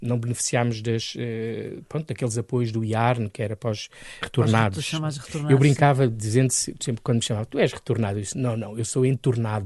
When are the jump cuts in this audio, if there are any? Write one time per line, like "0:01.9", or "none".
0:04.2